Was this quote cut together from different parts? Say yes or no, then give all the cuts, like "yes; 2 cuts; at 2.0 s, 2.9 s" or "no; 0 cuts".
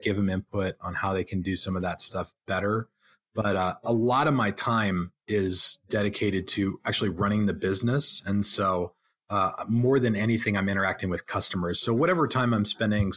no; 0 cuts